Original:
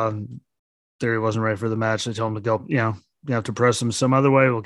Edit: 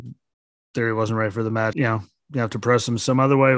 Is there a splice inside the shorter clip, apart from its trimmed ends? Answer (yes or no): yes